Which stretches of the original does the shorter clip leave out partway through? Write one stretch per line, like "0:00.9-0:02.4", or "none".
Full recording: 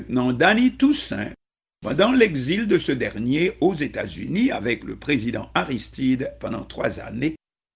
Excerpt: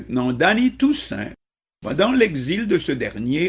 none